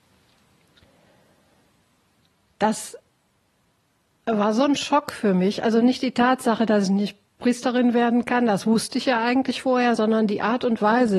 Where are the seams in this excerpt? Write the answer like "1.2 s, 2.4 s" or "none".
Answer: none